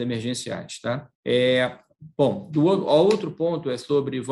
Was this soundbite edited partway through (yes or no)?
yes